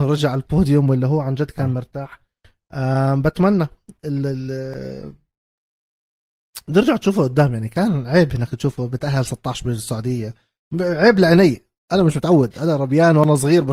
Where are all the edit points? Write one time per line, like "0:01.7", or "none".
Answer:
none